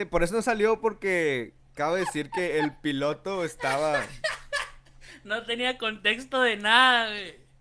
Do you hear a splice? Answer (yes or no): no